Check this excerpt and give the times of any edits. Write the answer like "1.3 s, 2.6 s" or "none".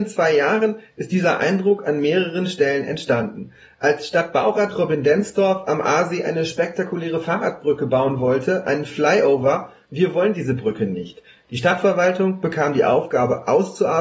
9.9 s